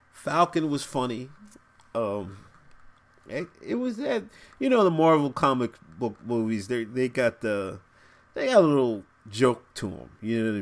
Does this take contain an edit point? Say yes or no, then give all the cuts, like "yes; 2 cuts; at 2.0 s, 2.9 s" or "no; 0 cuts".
no; 0 cuts